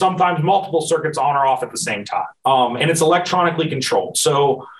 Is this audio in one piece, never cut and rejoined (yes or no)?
no